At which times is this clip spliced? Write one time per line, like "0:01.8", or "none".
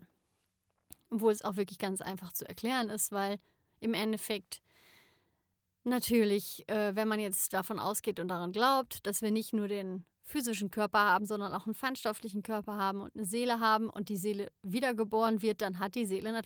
none